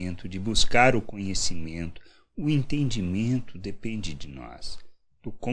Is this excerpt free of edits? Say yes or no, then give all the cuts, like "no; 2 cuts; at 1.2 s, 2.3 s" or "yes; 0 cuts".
yes; 0 cuts